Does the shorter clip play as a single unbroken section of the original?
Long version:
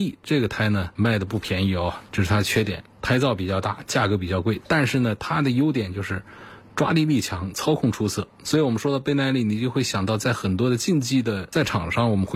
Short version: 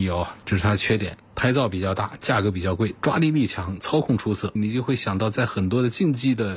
no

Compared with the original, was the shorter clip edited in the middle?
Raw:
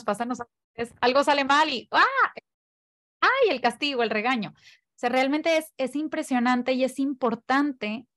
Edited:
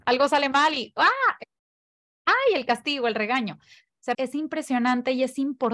yes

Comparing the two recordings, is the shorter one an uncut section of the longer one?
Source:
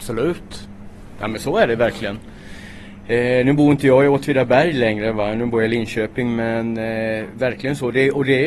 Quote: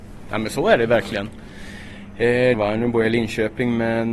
no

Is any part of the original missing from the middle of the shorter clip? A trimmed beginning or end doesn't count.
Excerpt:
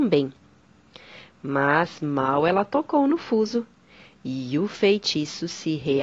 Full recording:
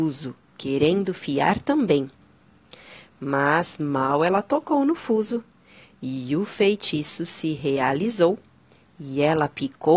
no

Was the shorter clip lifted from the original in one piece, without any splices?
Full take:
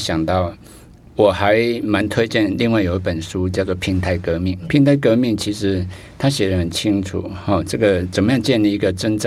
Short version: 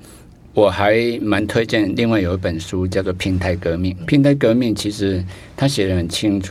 yes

